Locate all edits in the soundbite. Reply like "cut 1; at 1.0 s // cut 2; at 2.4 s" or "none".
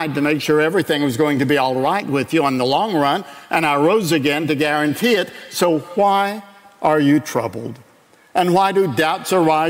none